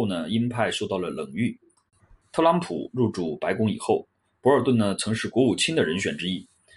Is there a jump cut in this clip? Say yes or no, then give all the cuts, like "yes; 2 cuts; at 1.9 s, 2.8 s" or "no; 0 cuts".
yes; 1 cut; at 2.2 s